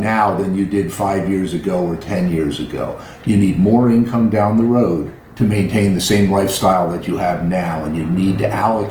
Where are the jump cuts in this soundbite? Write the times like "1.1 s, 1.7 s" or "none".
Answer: 5.2 s

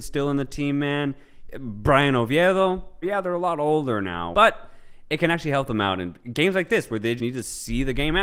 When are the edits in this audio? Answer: 3.0 s, 4.3 s, 7.2 s

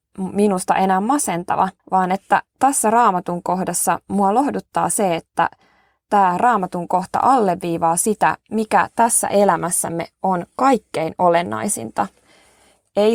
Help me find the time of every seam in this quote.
1.8 s

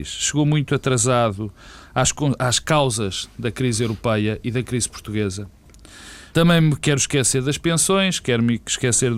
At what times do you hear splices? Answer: 6.3 s, 8.2 s

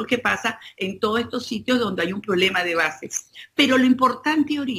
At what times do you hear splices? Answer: none

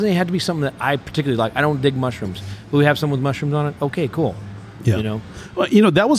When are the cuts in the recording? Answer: none

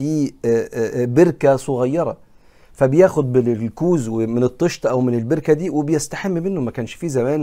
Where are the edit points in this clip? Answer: none

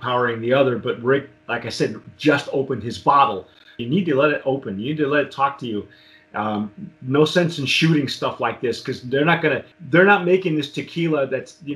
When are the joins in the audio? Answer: 3.8 s, 9.7 s

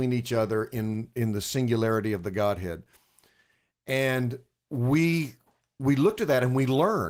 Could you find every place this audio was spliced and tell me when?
none

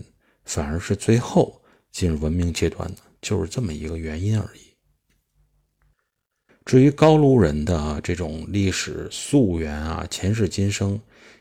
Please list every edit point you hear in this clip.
6.5 s

